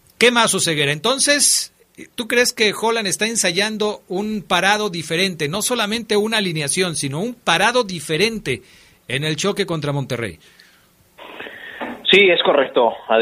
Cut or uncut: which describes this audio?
uncut